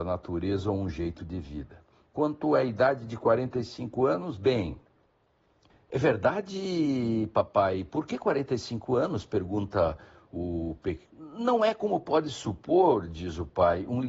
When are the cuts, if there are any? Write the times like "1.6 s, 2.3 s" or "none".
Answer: 11.1 s